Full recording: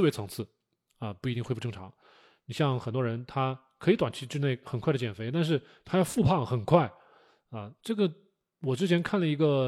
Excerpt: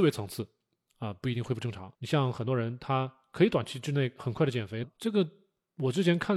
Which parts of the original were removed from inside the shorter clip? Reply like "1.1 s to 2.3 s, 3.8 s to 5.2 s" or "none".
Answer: 2.0 s to 2.4 s, 5.3 s to 7.7 s